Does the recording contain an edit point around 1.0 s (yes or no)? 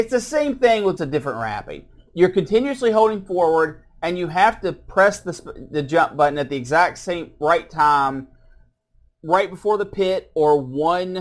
yes